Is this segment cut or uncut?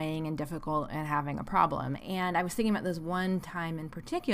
cut